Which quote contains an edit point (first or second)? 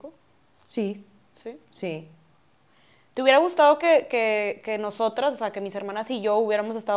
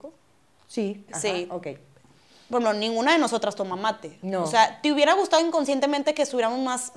second